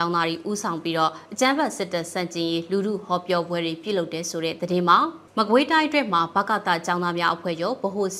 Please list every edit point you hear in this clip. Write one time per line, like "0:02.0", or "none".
0:05.3